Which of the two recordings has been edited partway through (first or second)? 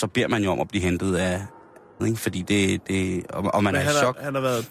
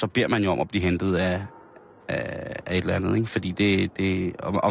first